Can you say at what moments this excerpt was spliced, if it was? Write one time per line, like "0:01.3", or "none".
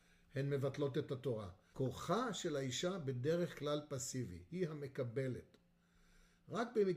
0:01.7
0:04.5